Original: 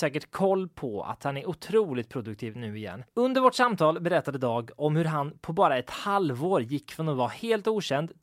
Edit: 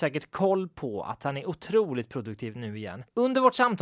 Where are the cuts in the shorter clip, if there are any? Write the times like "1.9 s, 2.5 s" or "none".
none